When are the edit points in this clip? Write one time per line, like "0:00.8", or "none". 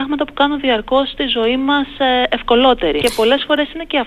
0:03.0